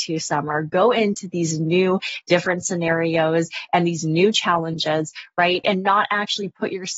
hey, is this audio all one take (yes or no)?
no